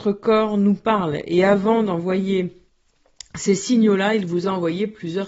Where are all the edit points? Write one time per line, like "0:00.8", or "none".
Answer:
none